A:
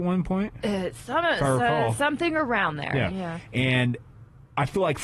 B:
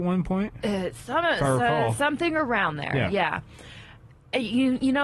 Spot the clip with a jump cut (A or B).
A